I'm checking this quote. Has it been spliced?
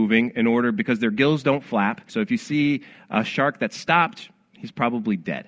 yes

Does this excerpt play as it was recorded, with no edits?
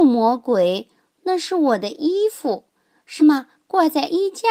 no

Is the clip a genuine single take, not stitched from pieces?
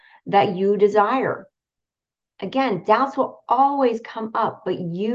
yes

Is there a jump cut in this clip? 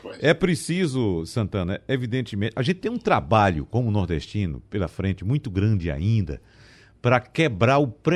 no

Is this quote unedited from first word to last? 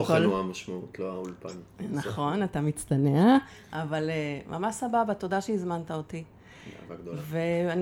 yes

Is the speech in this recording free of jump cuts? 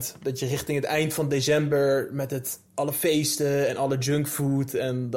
yes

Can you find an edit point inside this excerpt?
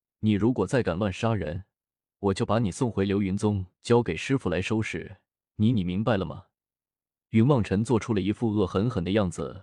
no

